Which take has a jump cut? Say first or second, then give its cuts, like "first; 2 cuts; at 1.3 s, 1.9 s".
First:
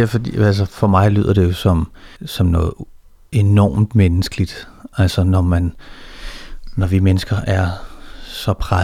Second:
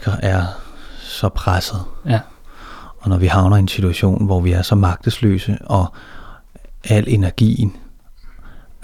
first; 1 cut; at 2.1 s